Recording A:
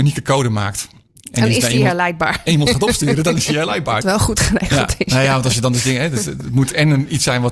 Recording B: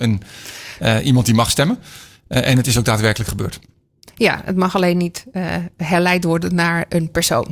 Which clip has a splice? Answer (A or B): A